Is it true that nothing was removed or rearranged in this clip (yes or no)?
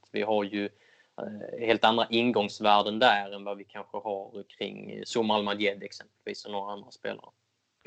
yes